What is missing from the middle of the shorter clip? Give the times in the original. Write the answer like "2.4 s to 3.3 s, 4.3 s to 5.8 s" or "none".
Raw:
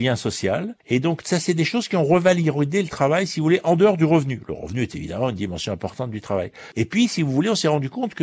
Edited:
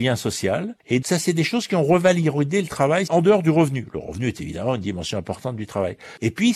1.0 s to 1.2 s, 3.3 s to 3.6 s